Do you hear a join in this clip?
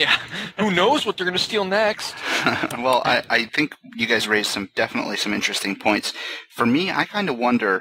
no; 0 cuts

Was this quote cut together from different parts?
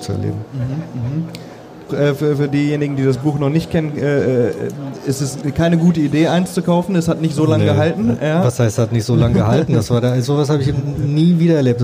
yes; 1 cut; at 1.9 s

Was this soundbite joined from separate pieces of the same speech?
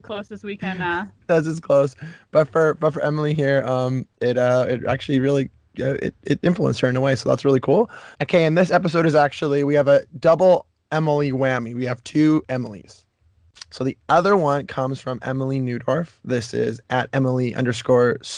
yes; 1 cut; at 8.1 s

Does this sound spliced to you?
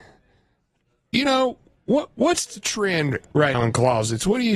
yes; 1 cut; at 3.5 s

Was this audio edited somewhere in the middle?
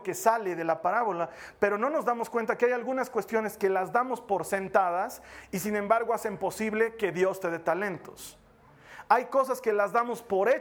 no; 0 cuts

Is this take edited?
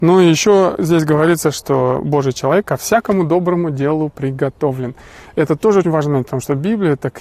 yes; 1 cut; at 5.8 s

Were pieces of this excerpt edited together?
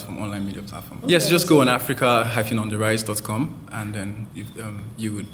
yes; 2 cuts; at 1.0 s, 4.3 s

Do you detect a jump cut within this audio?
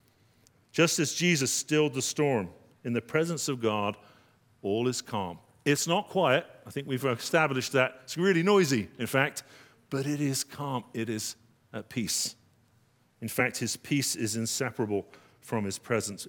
no; 0 cuts

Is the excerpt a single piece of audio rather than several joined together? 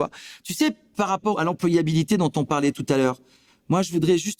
yes; 0 cuts

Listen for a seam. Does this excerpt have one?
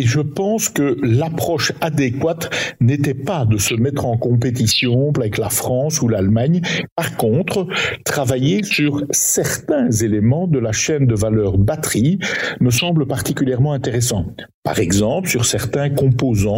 yes; 1 cut; at 5.1 s

